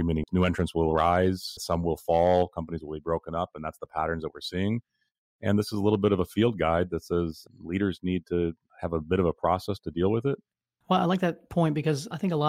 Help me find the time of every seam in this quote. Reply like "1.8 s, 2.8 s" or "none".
none